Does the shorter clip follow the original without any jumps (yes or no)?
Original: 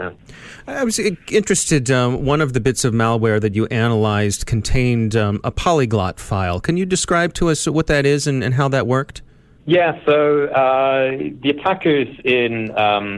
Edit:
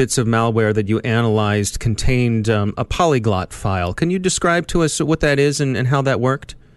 yes